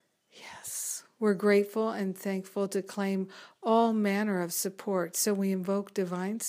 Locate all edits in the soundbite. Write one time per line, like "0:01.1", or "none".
0:01.1

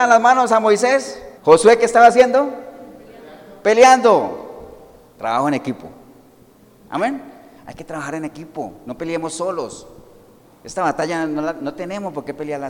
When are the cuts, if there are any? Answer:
0:01.4

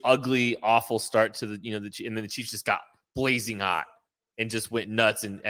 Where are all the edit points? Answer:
none

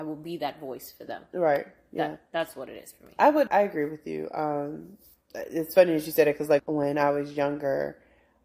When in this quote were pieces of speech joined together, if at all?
0:03.5
0:06.6

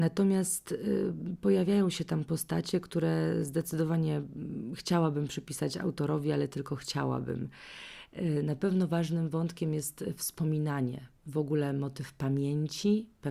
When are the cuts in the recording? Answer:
none

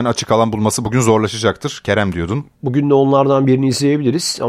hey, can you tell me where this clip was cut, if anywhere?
0:02.5

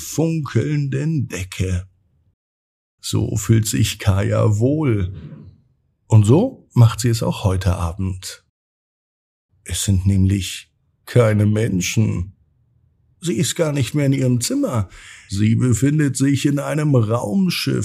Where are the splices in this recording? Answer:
0:09.5
0:13.2

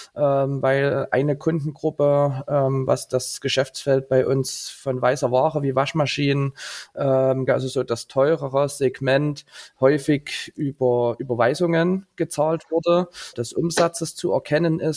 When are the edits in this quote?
0:07.5
0:13.3

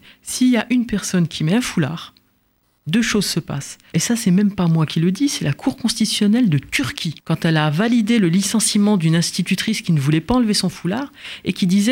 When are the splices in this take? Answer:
0:03.9
0:07.2

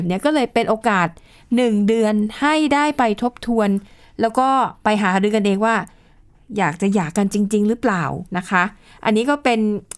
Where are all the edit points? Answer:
0:08.3

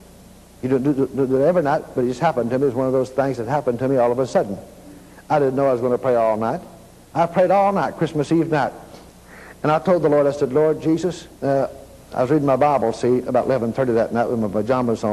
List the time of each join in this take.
0:07.1
0:11.3

